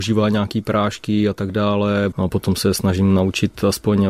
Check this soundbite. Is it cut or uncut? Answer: cut